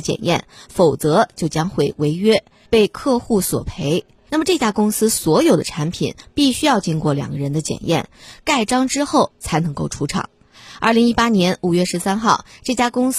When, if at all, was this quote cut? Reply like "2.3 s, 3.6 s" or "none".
4.3 s

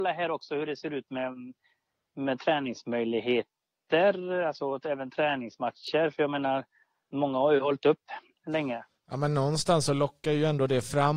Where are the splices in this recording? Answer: none

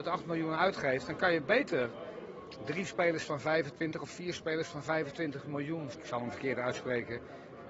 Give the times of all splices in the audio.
5.9 s

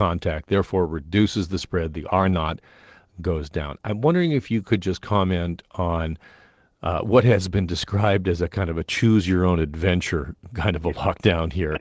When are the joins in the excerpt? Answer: none

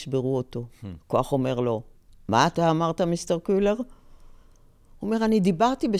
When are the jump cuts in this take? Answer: 1.0 s

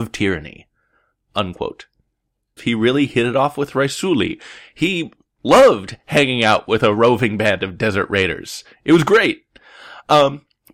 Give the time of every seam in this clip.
2.6 s

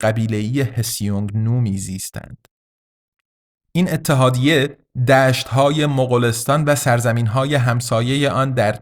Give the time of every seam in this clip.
none

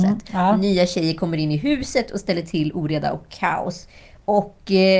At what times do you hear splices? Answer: none

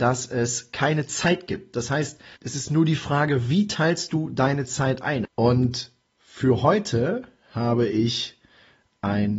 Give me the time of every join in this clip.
2.4 s, 5.2 s

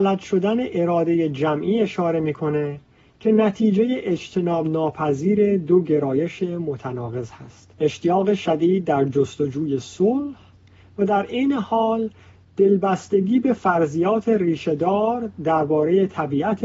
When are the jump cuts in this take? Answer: 7.7 s

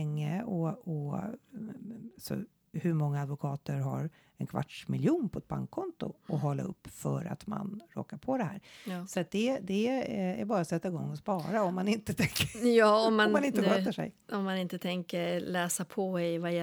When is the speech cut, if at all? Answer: none

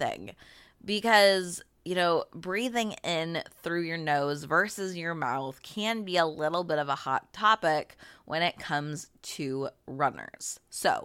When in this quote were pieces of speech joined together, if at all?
none

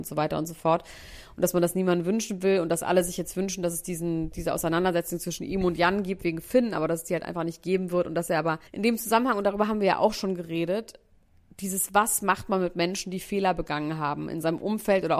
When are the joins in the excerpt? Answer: 8.7 s

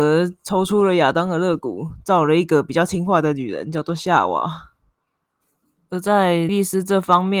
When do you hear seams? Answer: 6.5 s

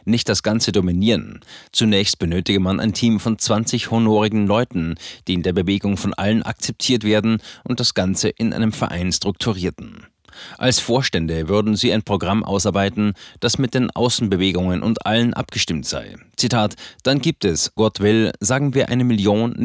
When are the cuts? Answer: 17.8 s

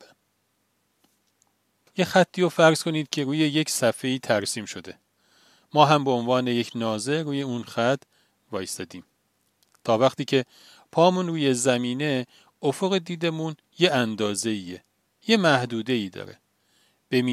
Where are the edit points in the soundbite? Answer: none

